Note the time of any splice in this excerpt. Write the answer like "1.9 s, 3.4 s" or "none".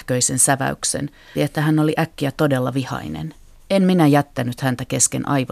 1.3 s, 3.6 s